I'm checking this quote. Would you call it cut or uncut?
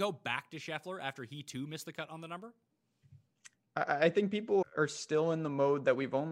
cut